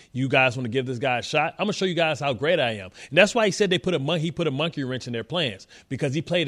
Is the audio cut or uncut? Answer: uncut